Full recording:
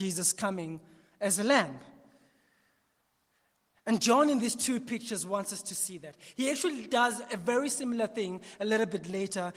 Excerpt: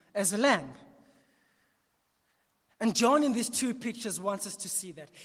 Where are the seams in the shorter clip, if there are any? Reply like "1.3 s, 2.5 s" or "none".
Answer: none